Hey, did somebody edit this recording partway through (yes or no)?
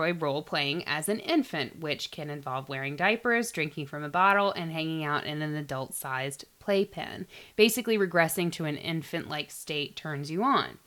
no